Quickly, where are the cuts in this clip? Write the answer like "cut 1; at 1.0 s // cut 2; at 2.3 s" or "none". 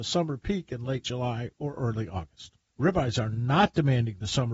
cut 1; at 2.7 s